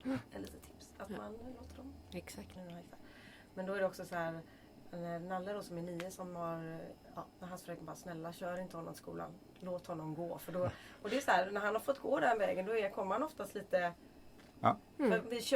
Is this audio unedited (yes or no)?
no